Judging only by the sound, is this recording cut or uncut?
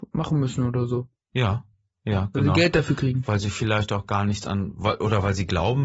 uncut